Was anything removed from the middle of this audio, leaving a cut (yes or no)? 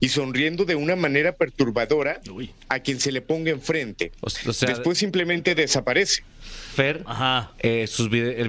yes